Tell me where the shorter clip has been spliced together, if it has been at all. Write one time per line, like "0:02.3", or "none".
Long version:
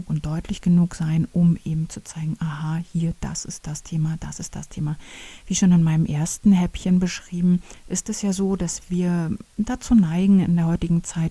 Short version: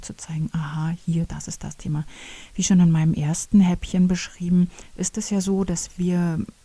0:01.3